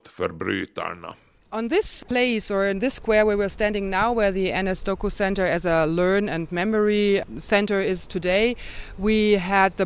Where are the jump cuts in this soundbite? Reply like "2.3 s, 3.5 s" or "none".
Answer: none